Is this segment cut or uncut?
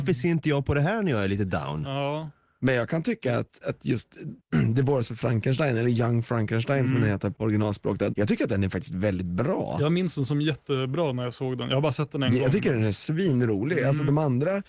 cut